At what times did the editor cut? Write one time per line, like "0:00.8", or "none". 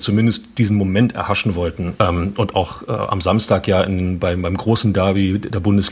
0:02.0